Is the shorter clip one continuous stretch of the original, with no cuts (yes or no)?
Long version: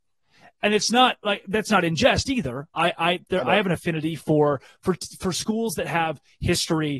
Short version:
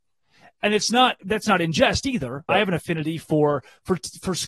no